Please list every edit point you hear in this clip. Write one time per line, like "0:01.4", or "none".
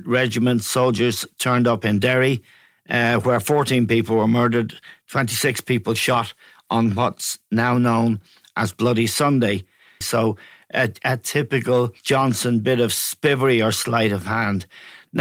0:10.0
0:12.0